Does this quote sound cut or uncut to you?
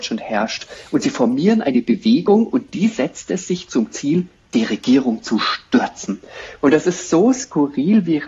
uncut